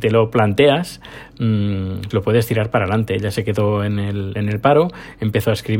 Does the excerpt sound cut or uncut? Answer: cut